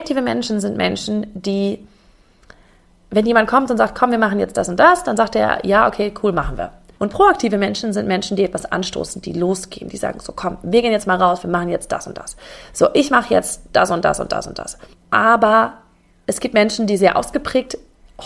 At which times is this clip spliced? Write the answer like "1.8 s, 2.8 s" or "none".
6.9 s, 14.9 s